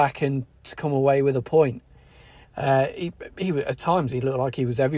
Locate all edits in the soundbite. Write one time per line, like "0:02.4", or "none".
0:02.4